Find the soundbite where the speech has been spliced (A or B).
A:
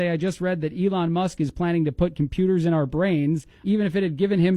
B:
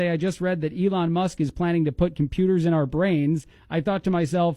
A